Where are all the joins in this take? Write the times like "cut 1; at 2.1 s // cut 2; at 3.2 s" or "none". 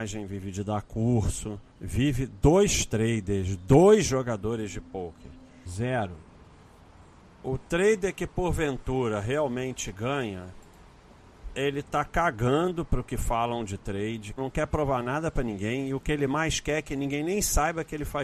cut 1; at 1.7 s // cut 2; at 5.7 s // cut 3; at 14.4 s